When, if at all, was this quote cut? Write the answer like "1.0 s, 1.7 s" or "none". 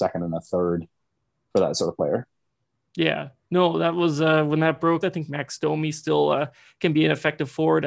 5.0 s